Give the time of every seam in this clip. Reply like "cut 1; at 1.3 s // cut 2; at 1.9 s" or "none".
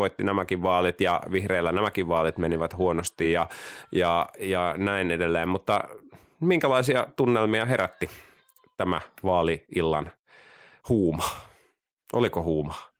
none